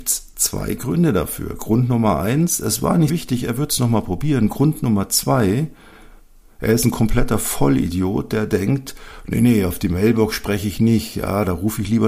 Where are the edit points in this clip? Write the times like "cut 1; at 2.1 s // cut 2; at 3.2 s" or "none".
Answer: cut 1; at 3.1 s